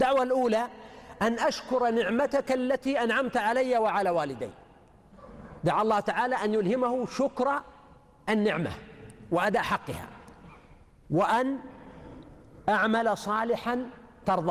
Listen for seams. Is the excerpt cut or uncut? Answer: uncut